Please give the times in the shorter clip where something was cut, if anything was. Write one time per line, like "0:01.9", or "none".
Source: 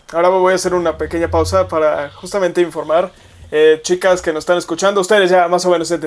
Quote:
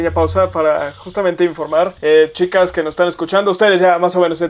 0:02.0